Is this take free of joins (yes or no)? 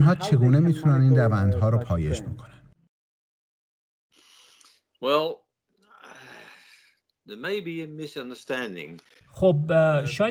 yes